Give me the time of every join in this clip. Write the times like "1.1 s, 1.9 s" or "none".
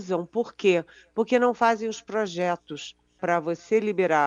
3.2 s